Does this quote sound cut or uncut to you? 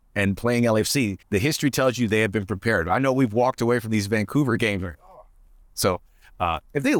cut